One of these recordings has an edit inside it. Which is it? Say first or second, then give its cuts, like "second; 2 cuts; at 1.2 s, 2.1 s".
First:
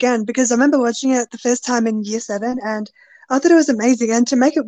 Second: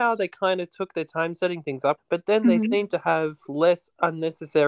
second; 1 cut; at 2.0 s